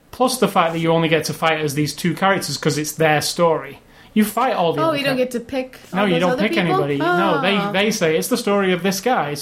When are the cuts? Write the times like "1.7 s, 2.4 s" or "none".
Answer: none